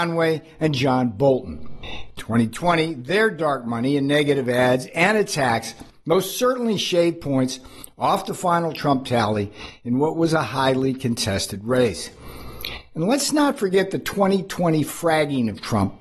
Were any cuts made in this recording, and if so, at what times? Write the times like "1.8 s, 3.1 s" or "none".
none